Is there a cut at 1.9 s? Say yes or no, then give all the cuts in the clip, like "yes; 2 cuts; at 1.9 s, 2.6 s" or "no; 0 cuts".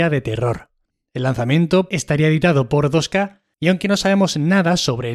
yes; 1 cut; at 1.9 s